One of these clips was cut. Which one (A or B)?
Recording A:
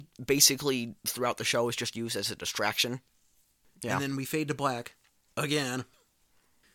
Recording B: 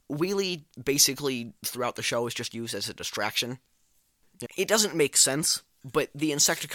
B